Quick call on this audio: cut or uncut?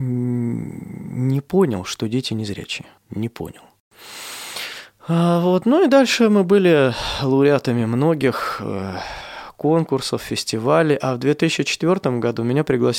cut